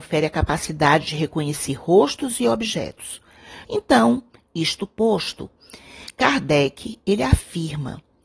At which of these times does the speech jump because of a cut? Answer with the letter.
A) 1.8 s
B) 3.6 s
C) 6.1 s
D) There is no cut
B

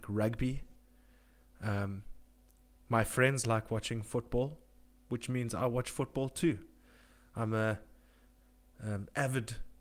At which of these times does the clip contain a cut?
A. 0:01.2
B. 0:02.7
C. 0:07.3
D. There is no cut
D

